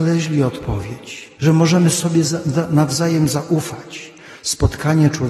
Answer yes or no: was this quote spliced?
yes